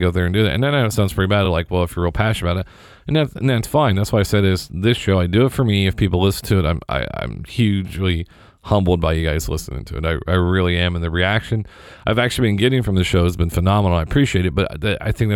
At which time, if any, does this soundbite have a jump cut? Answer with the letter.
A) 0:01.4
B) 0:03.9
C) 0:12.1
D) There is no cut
D